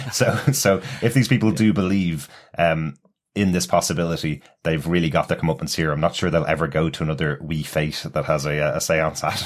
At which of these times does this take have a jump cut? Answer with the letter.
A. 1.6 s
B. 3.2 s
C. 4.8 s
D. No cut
D